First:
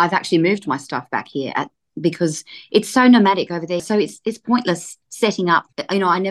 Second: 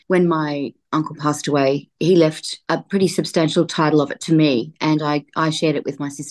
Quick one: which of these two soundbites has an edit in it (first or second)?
first